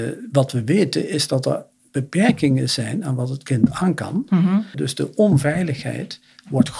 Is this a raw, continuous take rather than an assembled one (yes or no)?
no